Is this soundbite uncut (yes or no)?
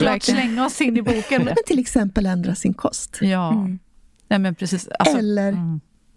no